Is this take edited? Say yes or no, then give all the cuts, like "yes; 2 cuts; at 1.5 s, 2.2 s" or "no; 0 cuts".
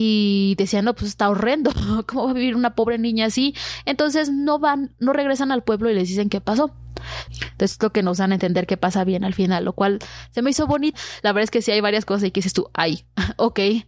yes; 2 cuts; at 7.3 s, 10.9 s